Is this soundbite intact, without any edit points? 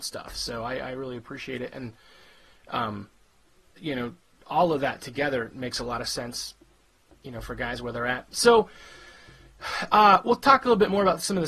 no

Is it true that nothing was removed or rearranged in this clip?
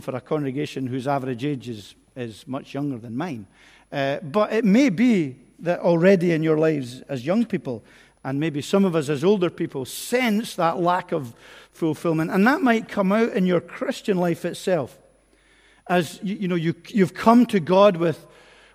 yes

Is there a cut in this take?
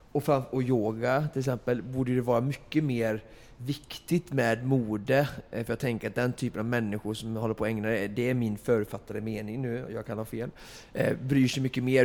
no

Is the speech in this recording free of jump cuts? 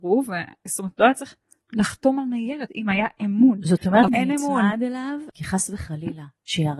no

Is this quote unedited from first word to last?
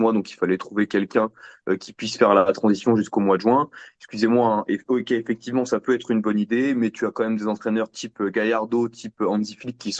yes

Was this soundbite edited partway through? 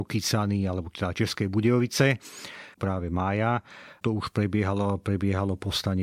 yes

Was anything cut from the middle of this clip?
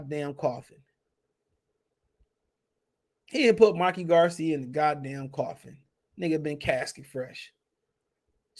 no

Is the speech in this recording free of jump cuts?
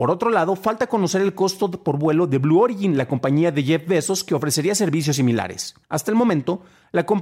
no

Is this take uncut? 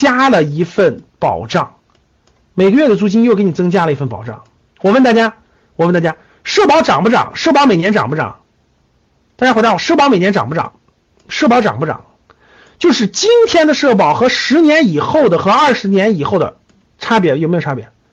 yes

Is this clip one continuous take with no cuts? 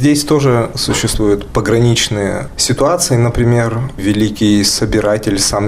yes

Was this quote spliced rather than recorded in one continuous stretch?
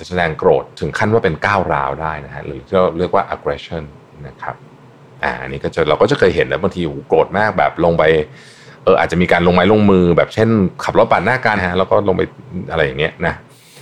yes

